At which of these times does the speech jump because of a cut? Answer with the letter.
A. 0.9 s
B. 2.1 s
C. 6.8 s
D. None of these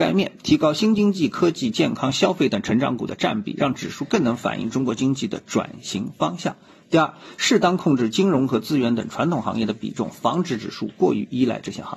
D